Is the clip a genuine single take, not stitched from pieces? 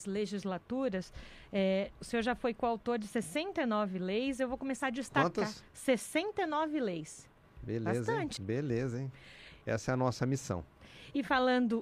no; 2 cuts; at 8.4 s, 9.6 s

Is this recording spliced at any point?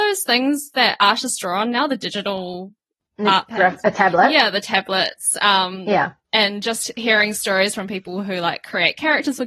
no; 0 cuts

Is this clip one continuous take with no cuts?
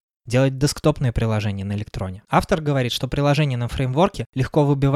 no; 1 cut; at 2.3 s

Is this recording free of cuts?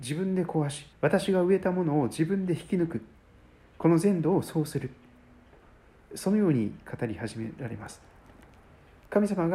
no; 1 cut; at 0.9 s

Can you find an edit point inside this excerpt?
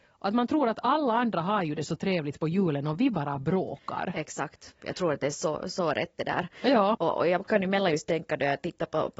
yes; 1 cut; at 6.9 s

